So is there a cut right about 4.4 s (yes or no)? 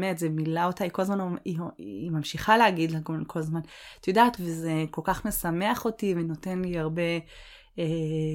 yes